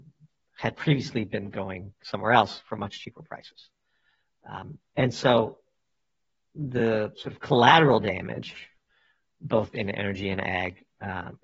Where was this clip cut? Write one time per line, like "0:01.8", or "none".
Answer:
none